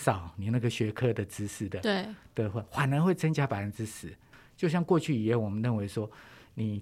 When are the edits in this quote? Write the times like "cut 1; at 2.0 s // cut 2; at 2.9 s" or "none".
none